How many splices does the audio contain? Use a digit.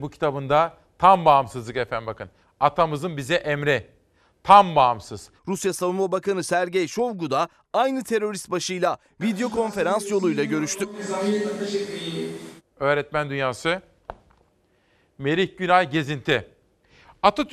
2